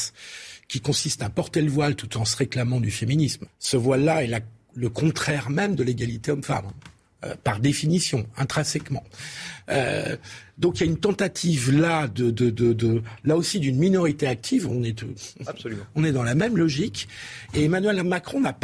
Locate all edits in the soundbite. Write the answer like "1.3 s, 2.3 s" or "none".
3.5 s

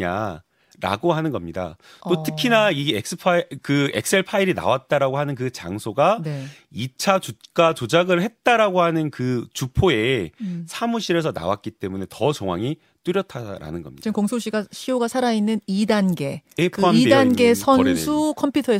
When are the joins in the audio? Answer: none

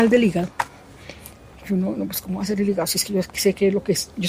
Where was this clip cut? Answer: none

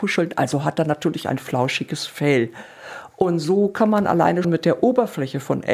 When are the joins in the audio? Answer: 4.4 s

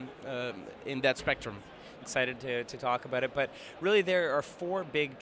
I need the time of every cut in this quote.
2.0 s

